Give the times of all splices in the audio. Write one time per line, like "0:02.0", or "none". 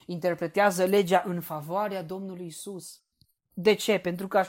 none